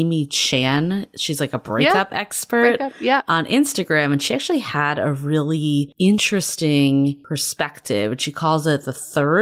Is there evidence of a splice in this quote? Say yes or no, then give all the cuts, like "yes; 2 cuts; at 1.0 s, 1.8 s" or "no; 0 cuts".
no; 0 cuts